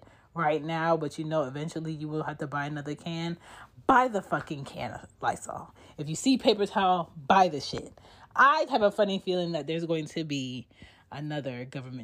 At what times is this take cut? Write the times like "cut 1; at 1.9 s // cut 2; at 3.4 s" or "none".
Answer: cut 1; at 8.7 s